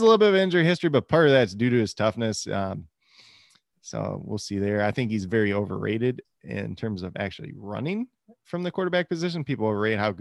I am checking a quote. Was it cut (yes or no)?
no